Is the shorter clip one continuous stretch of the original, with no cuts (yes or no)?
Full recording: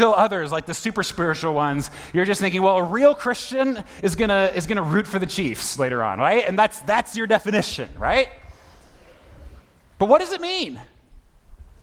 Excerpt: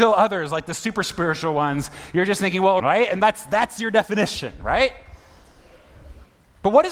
no